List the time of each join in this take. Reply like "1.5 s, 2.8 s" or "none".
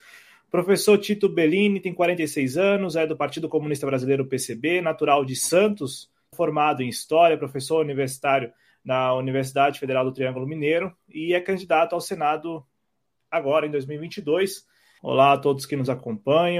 6.3 s, 15.0 s